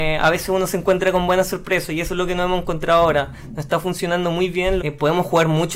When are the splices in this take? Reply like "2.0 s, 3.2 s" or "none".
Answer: 4.8 s